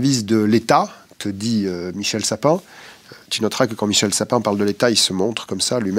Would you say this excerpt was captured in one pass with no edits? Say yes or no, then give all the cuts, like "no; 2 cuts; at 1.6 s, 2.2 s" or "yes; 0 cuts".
yes; 0 cuts